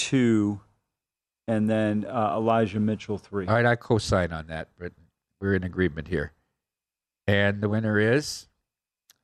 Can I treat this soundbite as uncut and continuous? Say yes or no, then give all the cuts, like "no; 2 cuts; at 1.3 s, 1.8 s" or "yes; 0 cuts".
yes; 0 cuts